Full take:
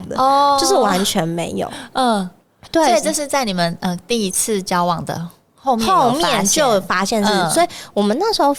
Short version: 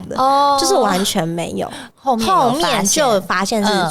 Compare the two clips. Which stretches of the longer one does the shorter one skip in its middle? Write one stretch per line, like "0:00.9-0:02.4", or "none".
0:01.9-0:05.5